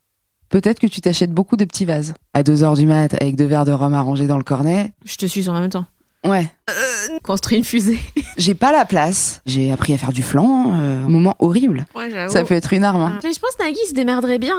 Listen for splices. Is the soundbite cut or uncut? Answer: cut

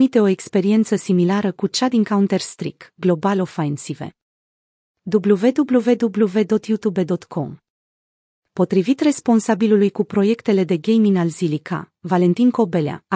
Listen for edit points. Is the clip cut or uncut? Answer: uncut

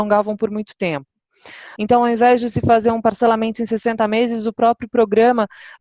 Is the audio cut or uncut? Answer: cut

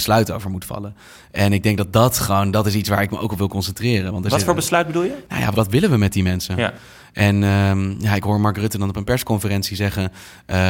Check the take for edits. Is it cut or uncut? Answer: cut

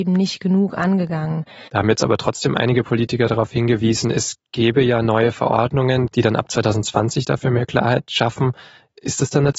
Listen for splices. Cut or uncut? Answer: cut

